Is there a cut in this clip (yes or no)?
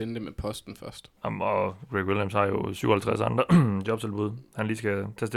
yes